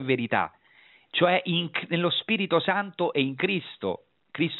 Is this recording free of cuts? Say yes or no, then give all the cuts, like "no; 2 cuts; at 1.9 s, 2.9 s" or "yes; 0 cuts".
yes; 0 cuts